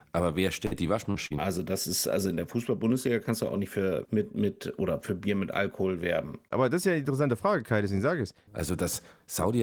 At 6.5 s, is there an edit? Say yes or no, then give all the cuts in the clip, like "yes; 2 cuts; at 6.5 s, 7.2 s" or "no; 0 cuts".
no; 3 cuts; at 1.4 s, 4.0 s, 8.5 s